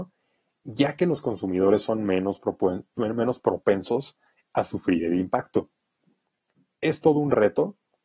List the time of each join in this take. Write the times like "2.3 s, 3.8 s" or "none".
none